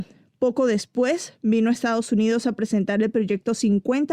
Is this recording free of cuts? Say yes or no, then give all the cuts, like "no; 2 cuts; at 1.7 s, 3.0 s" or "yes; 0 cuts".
yes; 0 cuts